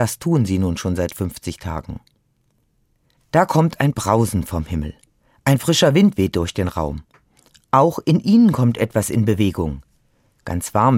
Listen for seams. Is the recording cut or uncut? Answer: uncut